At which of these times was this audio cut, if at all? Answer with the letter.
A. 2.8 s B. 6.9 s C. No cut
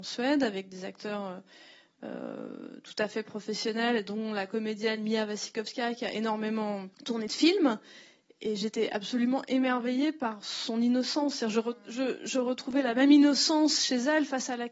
B